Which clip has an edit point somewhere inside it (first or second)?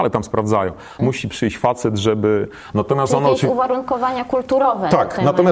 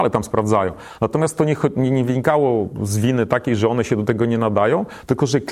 first